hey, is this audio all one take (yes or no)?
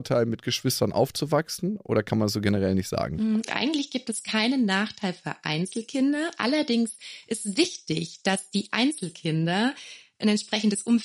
no